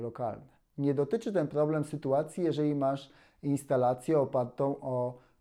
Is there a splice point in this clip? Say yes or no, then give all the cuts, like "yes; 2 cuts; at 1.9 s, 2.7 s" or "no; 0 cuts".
no; 0 cuts